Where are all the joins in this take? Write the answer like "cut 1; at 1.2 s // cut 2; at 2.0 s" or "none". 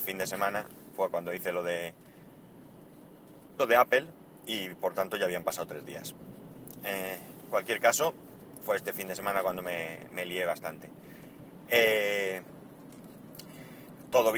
none